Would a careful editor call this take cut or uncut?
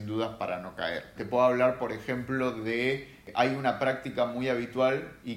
cut